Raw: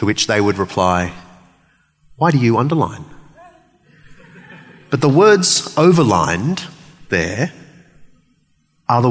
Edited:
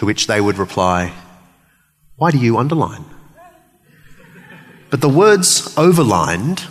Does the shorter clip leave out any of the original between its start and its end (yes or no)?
no